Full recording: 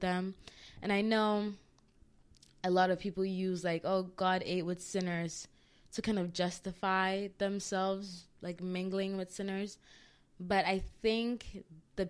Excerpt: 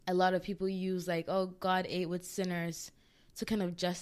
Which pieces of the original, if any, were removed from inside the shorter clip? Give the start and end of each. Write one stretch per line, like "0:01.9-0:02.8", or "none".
none